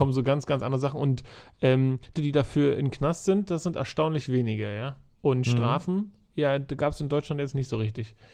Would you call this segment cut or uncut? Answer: cut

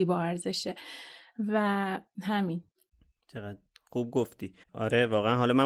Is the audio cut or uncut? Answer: cut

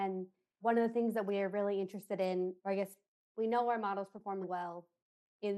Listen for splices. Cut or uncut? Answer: cut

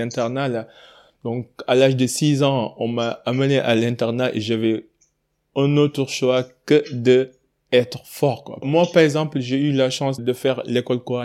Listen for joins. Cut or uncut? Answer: cut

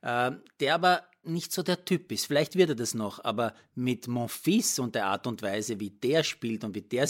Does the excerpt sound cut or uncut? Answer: cut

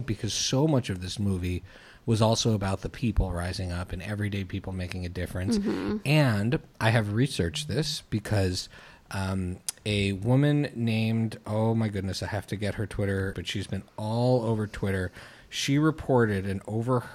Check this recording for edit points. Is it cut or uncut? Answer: cut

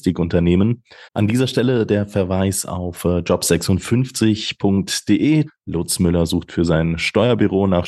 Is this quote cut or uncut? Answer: cut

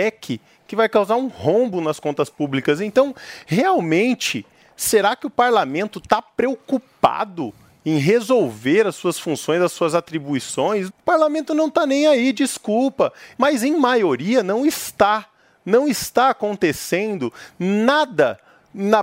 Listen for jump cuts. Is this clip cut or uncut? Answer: cut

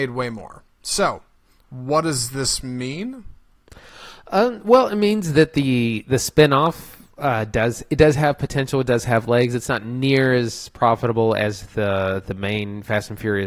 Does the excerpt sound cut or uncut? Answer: uncut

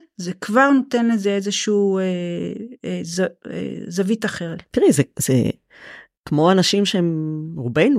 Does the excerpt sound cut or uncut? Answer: uncut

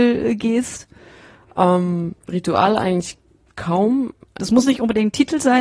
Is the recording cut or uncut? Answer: cut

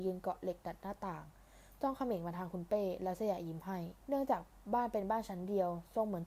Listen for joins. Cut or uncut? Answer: cut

